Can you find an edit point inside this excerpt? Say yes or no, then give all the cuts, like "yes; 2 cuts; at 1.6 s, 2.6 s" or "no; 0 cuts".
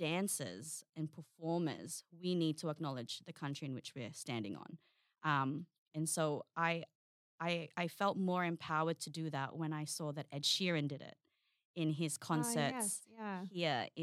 no; 0 cuts